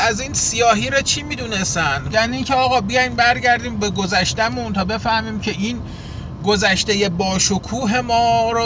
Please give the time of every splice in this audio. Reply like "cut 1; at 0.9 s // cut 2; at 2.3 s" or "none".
cut 1; at 2.1 s